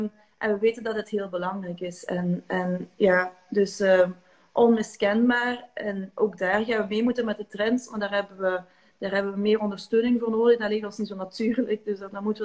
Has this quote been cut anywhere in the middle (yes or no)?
no